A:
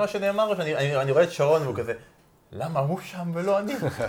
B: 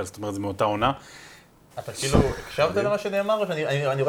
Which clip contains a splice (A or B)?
B